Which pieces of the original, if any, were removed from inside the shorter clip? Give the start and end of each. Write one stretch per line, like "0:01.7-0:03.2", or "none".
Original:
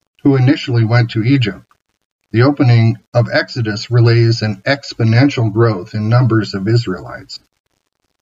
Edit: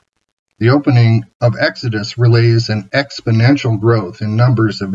none